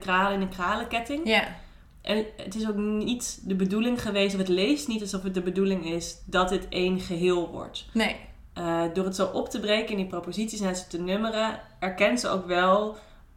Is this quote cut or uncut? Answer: uncut